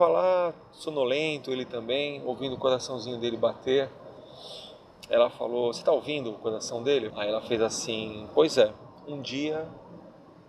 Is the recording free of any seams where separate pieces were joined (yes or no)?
no